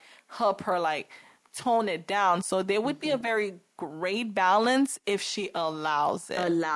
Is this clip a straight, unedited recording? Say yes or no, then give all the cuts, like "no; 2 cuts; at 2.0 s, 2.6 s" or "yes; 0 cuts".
yes; 0 cuts